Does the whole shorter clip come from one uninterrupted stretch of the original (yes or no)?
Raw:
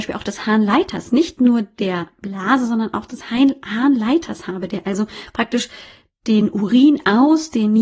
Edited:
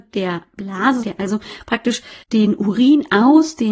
no